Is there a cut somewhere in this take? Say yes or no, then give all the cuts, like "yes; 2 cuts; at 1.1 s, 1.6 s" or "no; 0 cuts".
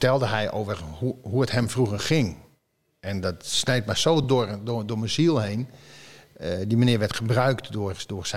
no; 0 cuts